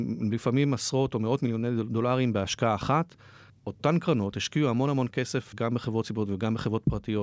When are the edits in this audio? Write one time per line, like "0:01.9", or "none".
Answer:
0:03.5